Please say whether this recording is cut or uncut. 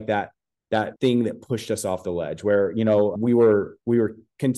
cut